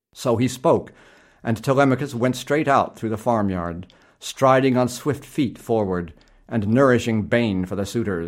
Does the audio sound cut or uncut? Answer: uncut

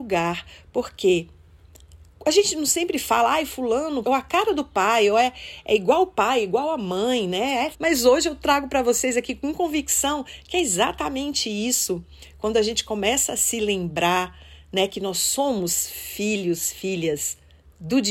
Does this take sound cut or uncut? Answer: cut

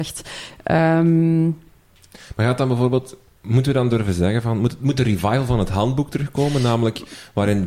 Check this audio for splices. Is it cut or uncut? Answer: uncut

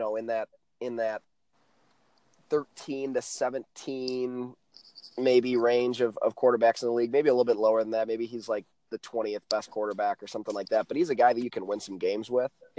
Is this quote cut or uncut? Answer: uncut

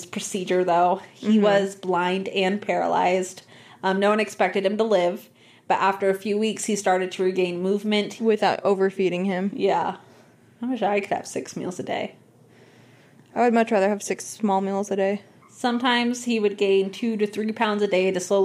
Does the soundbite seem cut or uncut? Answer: cut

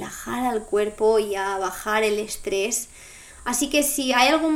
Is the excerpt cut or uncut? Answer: uncut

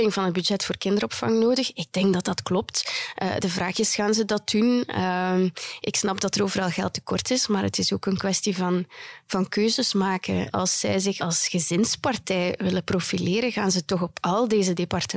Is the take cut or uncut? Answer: uncut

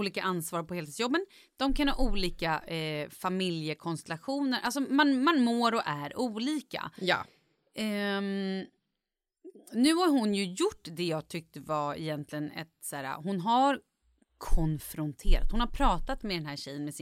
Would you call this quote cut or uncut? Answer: uncut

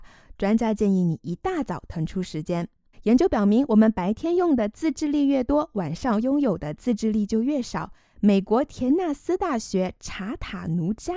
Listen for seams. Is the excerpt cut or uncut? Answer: cut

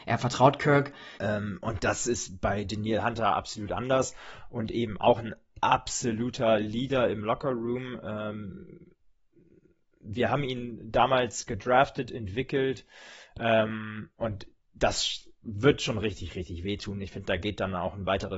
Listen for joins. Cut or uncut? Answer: cut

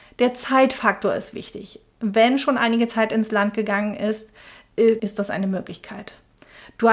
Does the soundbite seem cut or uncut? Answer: cut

